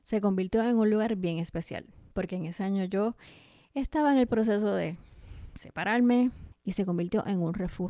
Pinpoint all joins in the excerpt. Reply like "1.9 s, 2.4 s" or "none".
6.5 s